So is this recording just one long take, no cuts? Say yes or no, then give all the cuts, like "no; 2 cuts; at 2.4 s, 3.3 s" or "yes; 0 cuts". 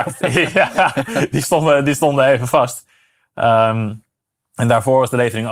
yes; 0 cuts